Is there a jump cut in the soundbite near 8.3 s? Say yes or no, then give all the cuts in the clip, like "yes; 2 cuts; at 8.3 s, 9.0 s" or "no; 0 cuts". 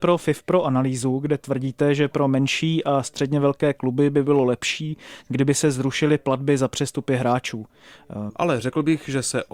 yes; 1 cut; at 8.3 s